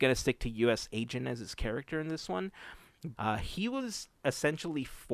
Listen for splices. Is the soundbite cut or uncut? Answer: cut